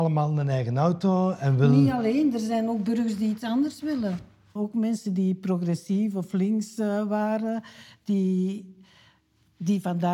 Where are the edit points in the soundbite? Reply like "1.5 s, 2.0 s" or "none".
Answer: 4.6 s